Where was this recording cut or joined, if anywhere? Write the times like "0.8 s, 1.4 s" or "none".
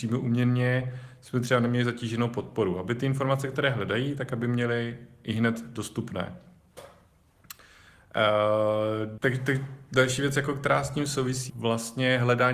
9.2 s, 11.5 s